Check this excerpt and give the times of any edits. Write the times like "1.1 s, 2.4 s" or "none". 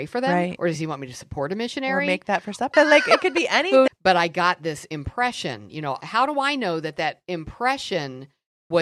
2.7 s, 3.9 s